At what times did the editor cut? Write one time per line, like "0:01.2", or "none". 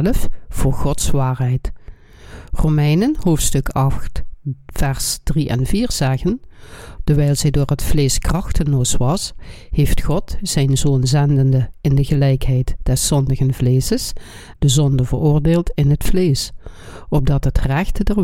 0:07.0
0:14.5